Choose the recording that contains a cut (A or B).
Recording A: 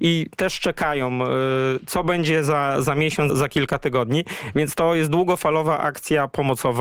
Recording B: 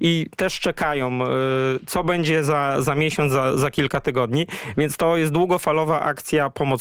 A